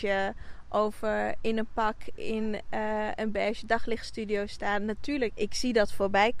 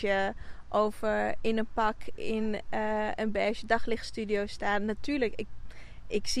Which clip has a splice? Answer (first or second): first